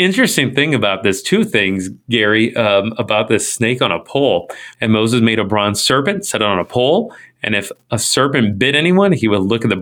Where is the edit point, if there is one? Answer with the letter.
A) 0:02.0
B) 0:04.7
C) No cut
B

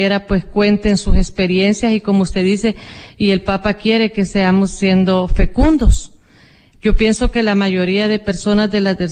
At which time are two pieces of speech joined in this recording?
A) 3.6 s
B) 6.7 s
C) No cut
B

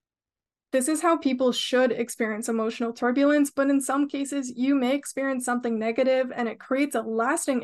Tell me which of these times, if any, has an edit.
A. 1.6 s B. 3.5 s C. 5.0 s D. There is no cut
D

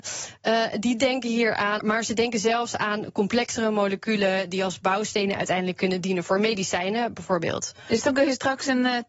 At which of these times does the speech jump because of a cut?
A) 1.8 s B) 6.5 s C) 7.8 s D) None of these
A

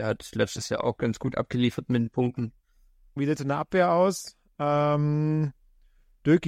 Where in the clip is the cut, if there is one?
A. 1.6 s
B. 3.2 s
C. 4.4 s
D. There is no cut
B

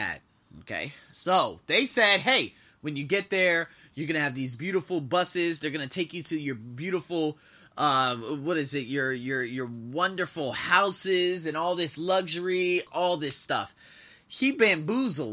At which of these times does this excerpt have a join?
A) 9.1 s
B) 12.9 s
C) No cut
B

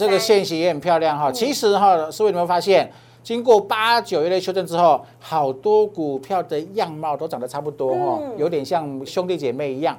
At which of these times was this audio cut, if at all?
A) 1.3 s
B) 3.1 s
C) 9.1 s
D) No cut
C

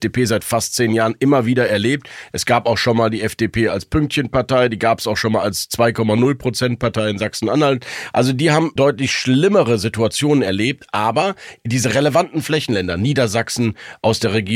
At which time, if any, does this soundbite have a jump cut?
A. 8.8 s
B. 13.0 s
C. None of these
A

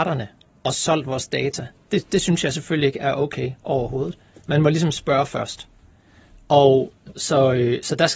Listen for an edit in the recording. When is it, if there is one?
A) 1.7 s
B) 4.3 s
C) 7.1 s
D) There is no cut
C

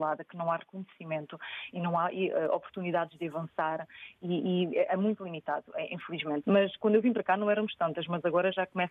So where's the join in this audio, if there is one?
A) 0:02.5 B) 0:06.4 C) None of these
B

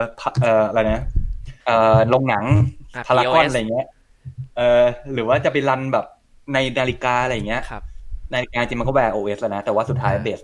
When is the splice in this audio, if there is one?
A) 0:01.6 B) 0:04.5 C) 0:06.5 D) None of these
A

